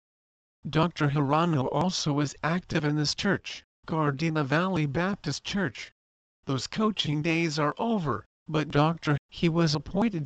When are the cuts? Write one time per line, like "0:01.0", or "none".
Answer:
0:06.4
0:09.2